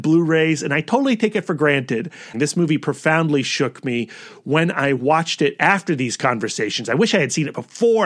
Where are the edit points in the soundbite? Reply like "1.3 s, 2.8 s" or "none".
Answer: 2.3 s